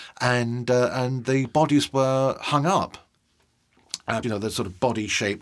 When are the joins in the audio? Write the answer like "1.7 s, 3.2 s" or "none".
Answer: 4.2 s